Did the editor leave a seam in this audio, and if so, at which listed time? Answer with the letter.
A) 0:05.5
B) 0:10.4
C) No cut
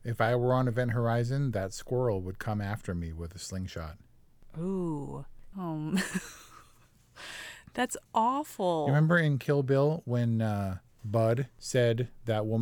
A